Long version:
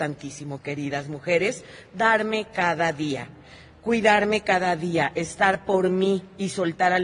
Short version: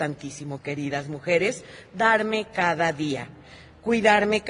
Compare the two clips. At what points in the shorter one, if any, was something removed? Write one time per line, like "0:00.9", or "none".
none